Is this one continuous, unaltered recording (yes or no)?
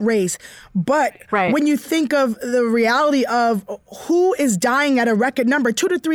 yes